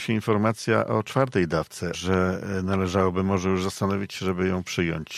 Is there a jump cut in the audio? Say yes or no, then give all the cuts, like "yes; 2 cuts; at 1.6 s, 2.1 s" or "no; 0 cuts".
yes; 1 cut; at 1.9 s